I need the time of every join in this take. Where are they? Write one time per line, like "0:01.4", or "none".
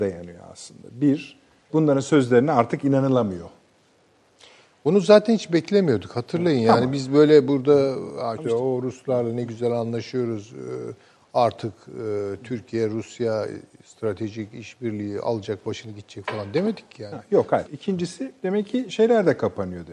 0:01.7
0:08.4
0:17.7